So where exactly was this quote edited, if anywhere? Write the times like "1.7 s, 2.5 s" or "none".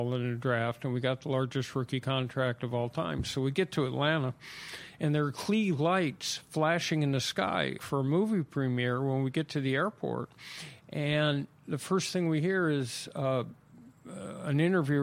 7.8 s